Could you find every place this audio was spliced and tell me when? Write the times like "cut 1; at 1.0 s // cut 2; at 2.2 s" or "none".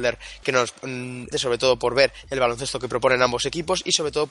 cut 1; at 1.3 s